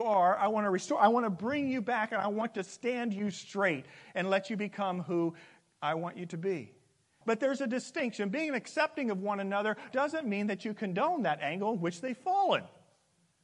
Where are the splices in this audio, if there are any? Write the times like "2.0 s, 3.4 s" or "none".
7.2 s, 9.9 s